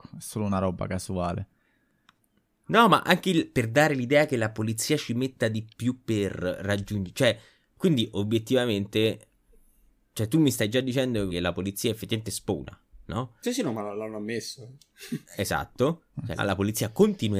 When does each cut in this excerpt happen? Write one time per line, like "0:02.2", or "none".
0:11.3
0:16.4